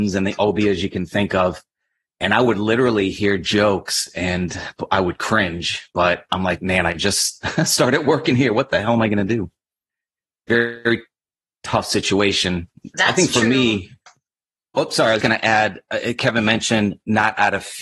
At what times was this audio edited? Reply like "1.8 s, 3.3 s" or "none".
12.9 s, 15.2 s